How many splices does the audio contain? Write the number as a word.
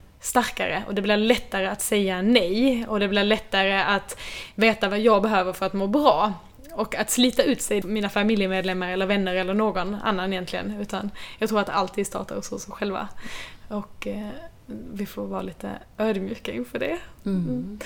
one